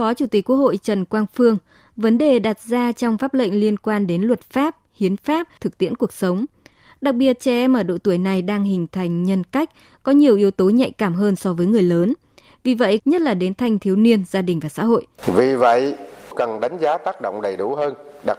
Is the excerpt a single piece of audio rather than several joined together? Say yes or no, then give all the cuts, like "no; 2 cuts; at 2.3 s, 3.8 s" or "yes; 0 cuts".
no; 3 cuts; at 5.6 s, 13.0 s, 15.2 s